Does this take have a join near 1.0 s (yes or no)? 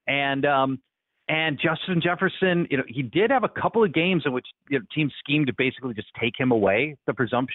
no